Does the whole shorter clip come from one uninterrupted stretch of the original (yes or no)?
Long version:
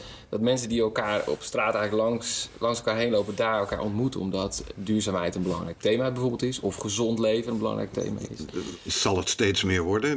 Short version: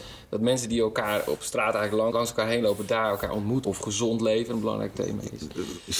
no